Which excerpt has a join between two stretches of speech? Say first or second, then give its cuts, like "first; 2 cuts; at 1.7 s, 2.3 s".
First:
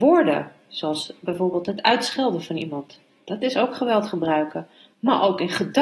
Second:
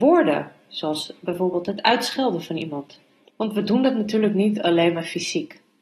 second; 1 cut; at 3.2 s